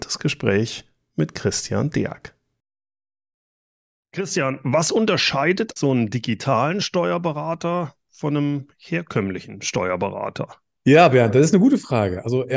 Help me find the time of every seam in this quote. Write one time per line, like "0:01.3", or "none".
0:05.8
0:10.8